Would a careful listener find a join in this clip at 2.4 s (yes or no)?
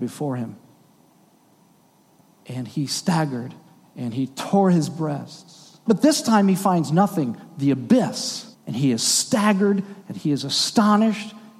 no